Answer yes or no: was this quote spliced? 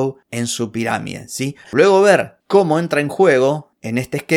yes